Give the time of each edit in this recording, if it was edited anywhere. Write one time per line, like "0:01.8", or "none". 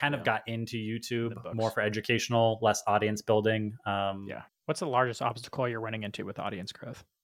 0:04.5

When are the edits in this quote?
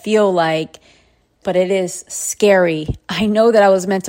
0:01.4

